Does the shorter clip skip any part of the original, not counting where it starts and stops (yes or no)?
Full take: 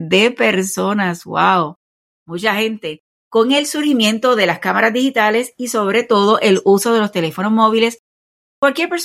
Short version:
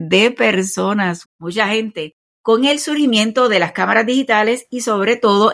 yes